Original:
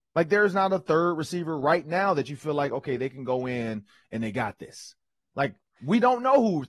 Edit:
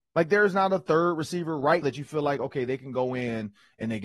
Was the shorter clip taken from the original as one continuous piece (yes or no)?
no